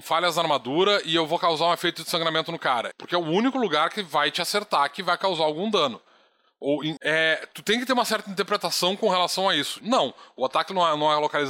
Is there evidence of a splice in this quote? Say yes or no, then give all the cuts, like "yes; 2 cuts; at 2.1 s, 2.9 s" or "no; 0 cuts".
yes; 3 cuts; at 2.9 s, 7.0 s, 9.8 s